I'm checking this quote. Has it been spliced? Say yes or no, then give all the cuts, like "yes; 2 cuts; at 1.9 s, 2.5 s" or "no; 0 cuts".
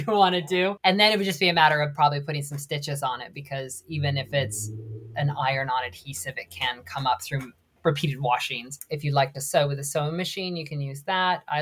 no; 0 cuts